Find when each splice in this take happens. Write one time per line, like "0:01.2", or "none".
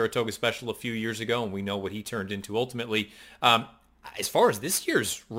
none